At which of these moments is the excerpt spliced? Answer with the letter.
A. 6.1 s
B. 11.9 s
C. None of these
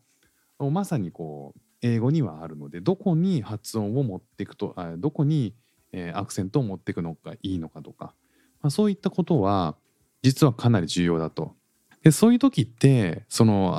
B